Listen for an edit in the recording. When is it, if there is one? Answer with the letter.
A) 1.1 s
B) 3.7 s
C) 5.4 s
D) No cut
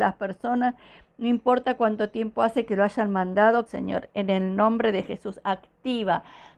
B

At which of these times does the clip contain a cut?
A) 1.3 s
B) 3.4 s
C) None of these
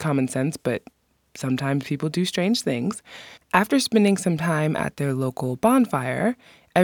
B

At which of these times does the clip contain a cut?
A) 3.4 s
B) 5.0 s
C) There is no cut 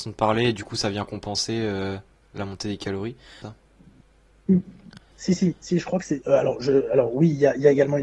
A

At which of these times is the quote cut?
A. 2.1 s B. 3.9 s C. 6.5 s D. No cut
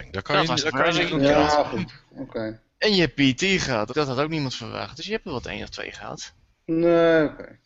B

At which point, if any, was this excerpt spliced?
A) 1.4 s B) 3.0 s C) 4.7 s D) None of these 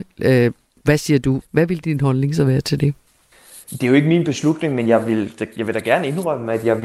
A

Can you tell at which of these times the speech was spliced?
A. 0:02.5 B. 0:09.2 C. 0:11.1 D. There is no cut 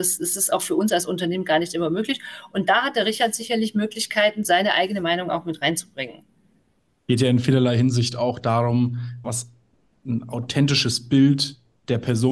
B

